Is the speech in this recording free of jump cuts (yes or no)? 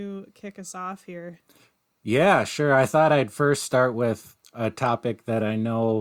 yes